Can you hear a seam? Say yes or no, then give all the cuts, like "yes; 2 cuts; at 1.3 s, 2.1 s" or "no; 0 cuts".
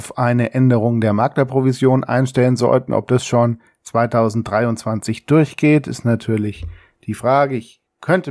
no; 0 cuts